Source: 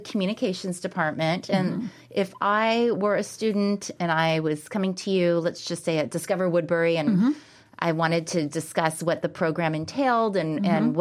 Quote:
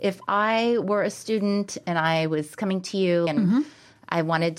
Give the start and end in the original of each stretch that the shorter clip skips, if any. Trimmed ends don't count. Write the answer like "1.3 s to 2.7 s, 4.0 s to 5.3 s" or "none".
5.4 s to 7.0 s